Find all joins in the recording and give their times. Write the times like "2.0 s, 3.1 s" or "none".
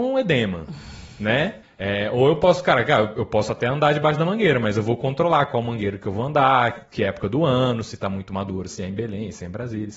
1.6 s, 8.7 s

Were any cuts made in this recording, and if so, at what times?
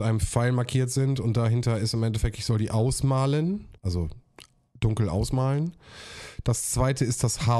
3.8 s

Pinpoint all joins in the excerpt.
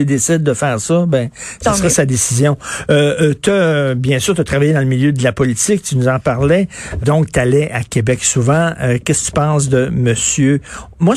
7.0 s

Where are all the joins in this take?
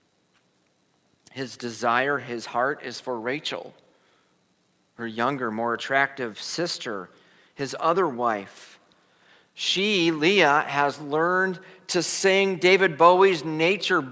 none

